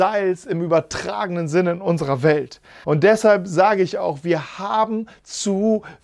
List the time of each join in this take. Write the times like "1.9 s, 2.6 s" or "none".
2.8 s